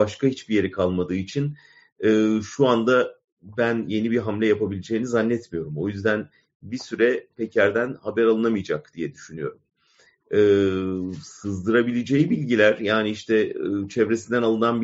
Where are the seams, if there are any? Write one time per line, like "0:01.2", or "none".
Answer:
none